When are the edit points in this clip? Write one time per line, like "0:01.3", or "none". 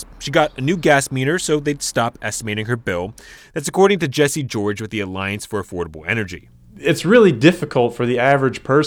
0:03.4